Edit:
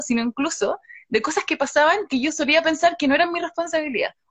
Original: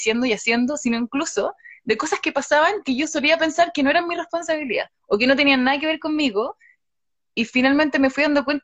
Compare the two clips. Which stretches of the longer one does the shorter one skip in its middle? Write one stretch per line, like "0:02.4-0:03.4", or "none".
none

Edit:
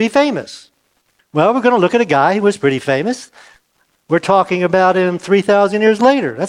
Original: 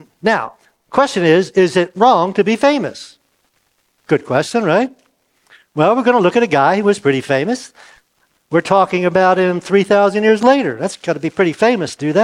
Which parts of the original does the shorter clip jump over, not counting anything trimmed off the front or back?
0:03.7-0:05.6

